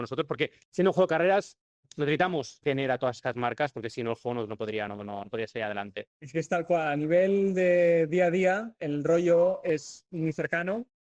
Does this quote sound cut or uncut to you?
uncut